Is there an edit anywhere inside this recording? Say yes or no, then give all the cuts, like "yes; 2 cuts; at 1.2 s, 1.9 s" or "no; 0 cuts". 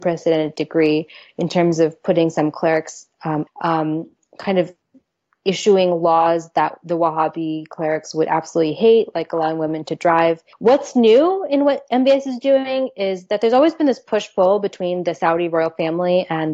yes; 2 cuts; at 3.5 s, 10.5 s